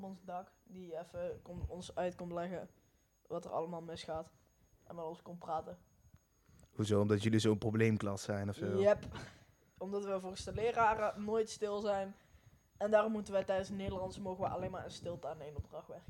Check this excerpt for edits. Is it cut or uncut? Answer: uncut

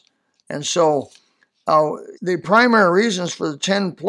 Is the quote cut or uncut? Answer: cut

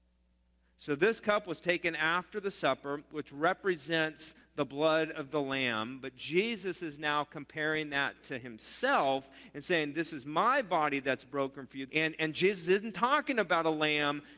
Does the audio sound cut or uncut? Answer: cut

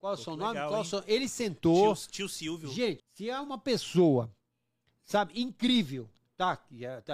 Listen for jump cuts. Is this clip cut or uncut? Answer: cut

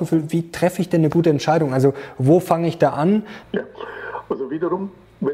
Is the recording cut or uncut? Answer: cut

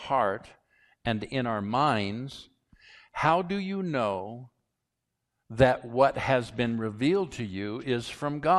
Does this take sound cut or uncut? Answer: uncut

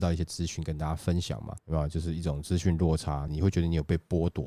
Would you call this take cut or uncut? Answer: cut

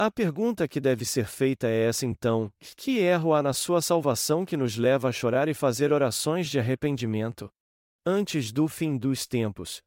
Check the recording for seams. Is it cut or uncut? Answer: cut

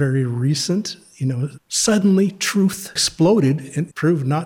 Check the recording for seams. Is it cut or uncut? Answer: cut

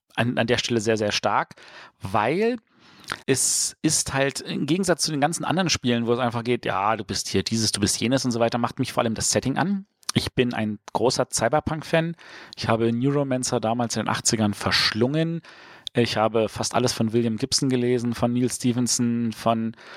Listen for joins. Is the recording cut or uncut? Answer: cut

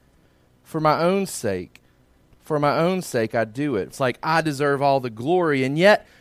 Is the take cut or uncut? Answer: cut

